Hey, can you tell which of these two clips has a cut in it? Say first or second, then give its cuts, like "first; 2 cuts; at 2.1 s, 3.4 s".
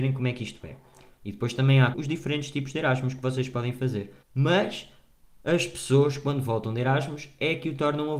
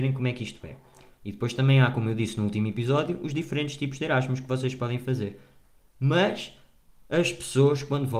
first; 2 cuts; at 1.9 s, 4.2 s